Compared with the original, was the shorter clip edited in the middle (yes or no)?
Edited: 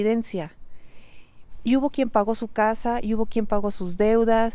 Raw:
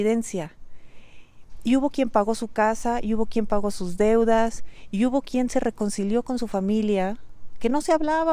no